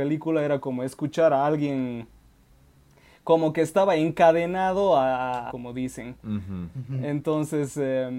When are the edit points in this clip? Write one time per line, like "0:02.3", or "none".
0:05.5